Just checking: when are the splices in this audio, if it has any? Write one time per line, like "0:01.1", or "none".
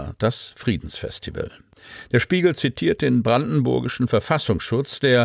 none